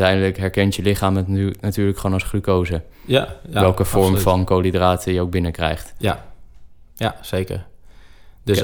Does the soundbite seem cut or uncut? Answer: uncut